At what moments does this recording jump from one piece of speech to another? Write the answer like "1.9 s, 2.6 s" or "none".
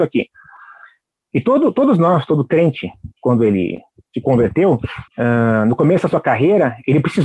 5.1 s

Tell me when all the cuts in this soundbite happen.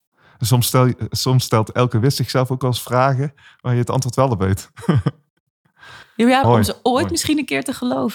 6.4 s

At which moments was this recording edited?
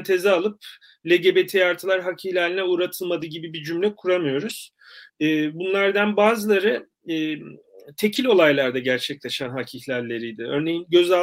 5.1 s

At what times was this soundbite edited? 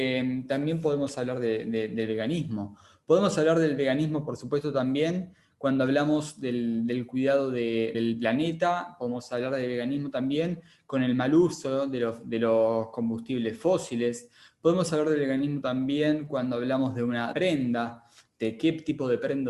7.9 s, 17.3 s

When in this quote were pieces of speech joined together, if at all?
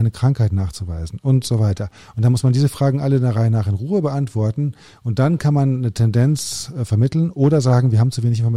none

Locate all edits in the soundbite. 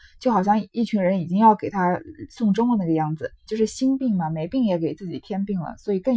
3.5 s

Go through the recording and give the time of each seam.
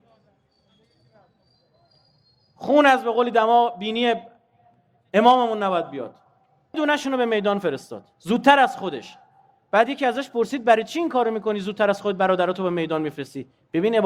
6.7 s

